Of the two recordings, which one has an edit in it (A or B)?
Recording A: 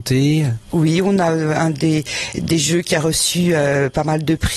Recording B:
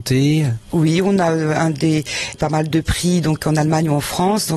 B